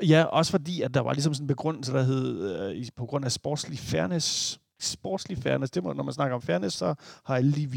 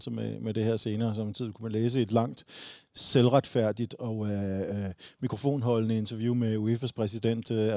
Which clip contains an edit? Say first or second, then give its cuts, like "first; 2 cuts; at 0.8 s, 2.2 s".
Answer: first; 2 cuts; at 4.8 s, 6.8 s